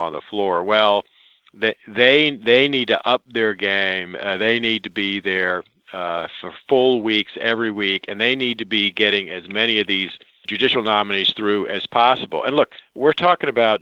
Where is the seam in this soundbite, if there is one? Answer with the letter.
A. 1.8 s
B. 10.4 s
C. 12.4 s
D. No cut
B